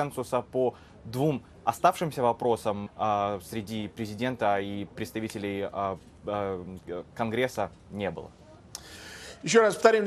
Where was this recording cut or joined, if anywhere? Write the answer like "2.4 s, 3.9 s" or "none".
2.9 s